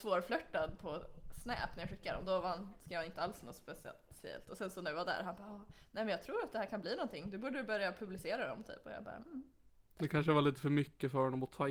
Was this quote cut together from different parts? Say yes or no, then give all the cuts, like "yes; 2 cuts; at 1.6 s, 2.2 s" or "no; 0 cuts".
no; 0 cuts